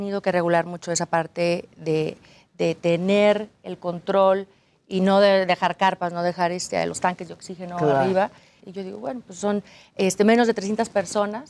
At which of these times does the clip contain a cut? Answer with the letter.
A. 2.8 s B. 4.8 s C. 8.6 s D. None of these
C